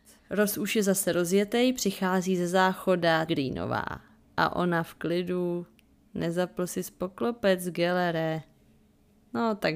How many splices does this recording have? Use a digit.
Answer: 1